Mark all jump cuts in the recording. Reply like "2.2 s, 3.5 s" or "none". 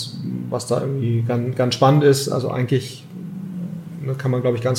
none